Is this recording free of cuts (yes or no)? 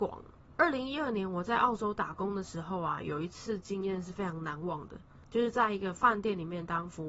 yes